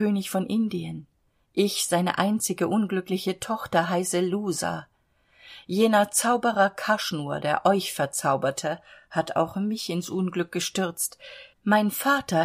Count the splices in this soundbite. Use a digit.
1